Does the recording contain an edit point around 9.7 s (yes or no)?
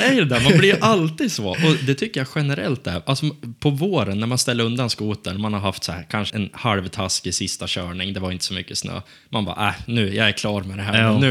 no